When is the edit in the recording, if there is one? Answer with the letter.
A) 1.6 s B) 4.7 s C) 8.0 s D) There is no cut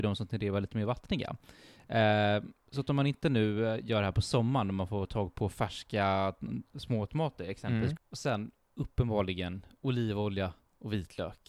C